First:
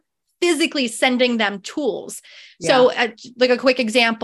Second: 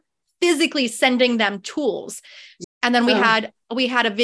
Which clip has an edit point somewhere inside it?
second; 1 cut; at 2.6 s

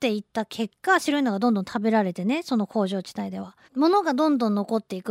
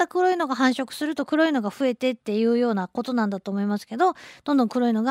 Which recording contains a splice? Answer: first; 1 cut; at 3.6 s

